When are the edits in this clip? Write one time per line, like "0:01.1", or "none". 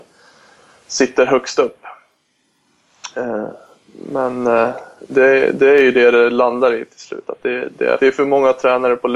0:05.1
0:08.0